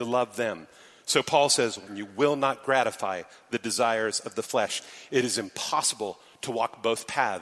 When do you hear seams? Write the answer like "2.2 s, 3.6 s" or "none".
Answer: 1.9 s